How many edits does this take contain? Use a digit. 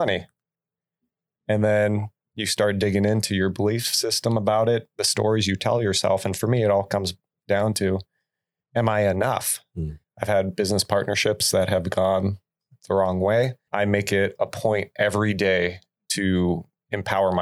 2